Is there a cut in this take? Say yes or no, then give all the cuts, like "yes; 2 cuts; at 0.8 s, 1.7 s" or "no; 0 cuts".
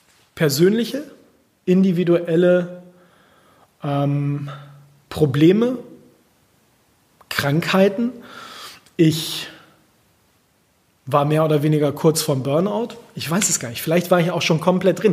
no; 0 cuts